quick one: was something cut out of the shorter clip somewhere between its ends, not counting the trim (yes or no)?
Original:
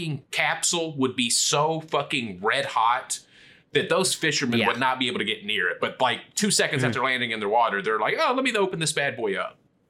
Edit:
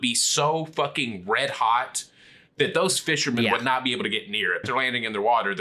yes